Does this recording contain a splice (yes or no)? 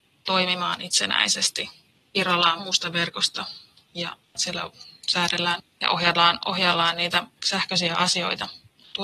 yes